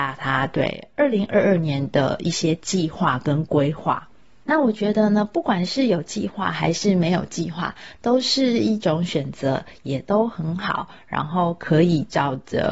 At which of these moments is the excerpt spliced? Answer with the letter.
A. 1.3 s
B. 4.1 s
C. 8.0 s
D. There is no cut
D